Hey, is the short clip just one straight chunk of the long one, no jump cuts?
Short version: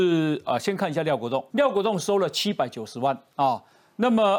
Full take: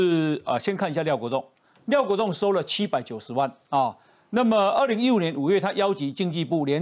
no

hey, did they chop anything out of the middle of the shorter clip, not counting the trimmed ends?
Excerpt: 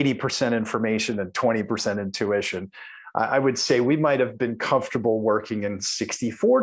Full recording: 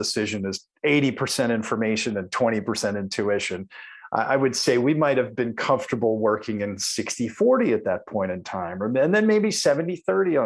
no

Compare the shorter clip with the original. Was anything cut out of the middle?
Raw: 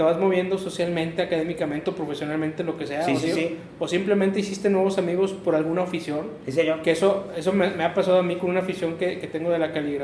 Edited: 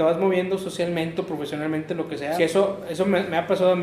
yes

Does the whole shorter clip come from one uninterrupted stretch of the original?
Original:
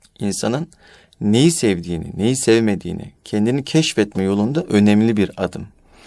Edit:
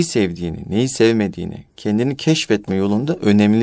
yes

